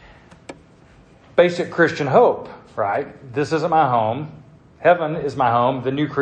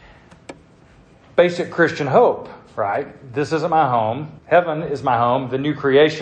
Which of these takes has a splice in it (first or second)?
second